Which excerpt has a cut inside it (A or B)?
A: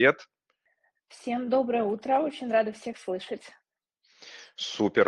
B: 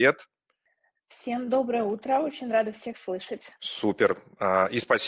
B